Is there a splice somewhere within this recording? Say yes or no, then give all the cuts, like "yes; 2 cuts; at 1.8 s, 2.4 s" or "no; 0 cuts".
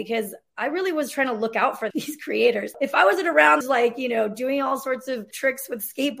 yes; 2 cuts; at 1.9 s, 3.6 s